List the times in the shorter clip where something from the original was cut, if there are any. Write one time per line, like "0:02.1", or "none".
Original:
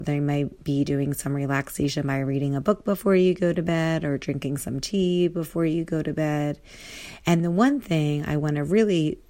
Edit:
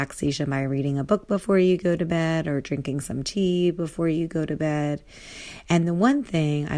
none